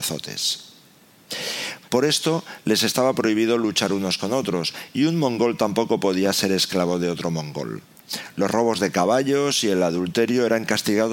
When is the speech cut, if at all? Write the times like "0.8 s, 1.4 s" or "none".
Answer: 1.8 s